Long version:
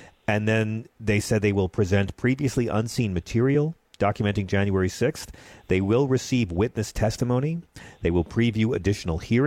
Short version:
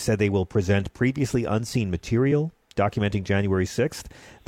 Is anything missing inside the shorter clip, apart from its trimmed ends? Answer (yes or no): no